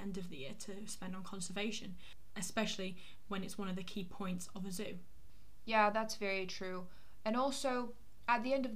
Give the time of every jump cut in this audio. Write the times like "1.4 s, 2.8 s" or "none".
none

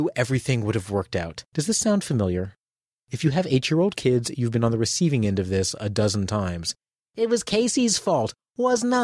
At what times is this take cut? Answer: 1.5 s

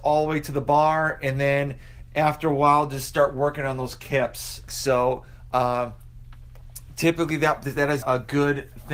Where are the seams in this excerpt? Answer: 4.7 s, 8.0 s

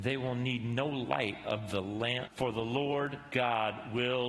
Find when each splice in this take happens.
2.3 s

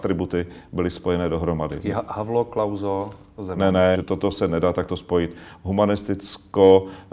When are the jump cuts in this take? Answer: 3.9 s

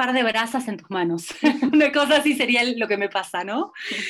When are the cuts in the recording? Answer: none

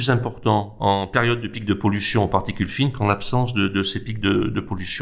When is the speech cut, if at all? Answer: none

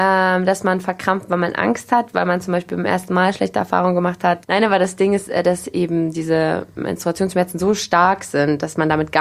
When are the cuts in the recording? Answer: 4.4 s

